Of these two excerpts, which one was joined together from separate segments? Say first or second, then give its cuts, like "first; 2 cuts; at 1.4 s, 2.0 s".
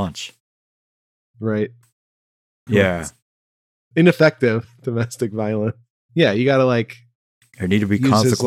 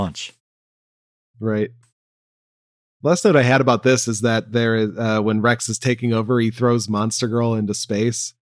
first; 2 cuts; at 2.7 s, 6.0 s